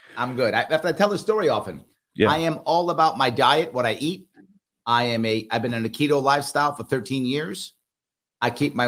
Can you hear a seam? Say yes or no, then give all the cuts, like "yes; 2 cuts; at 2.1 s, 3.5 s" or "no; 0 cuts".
no; 0 cuts